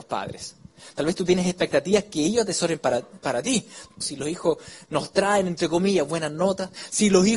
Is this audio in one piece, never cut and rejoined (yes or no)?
no